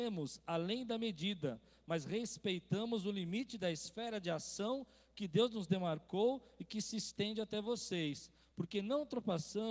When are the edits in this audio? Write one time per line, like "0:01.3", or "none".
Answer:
none